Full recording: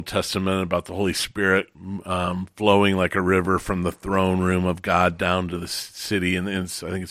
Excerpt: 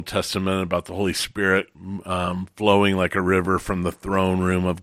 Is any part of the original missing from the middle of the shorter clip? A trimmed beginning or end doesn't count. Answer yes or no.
no